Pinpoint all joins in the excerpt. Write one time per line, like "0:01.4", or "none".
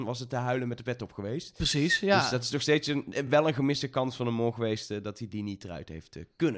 none